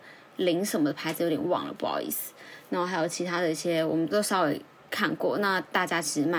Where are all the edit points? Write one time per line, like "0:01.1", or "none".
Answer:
0:04.1